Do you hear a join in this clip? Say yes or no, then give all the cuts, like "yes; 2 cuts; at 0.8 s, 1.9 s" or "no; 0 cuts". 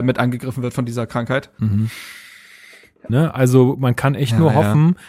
yes; 1 cut; at 3.1 s